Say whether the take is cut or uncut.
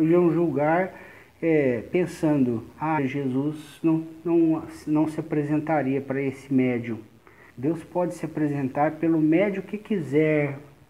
cut